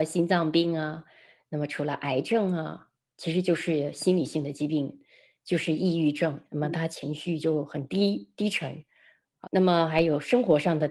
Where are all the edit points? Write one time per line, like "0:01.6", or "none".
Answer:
0:06.5
0:09.4